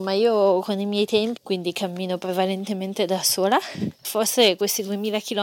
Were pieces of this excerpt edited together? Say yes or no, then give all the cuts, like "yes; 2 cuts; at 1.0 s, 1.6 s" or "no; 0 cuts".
yes; 2 cuts; at 1.4 s, 4.0 s